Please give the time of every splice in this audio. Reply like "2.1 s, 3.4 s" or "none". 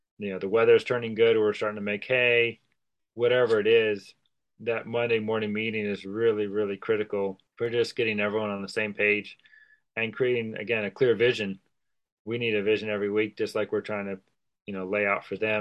7.5 s